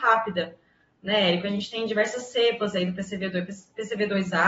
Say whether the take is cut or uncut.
uncut